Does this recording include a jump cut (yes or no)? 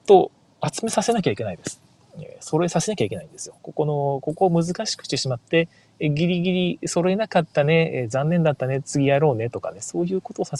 no